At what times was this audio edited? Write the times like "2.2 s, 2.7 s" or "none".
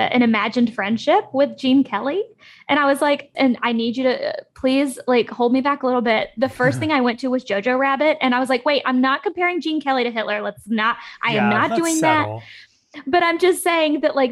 3.3 s